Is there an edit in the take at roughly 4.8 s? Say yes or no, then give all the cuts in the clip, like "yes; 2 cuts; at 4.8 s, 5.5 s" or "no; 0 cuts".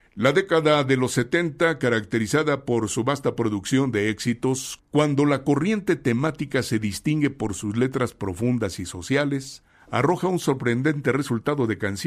yes; 1 cut; at 4.8 s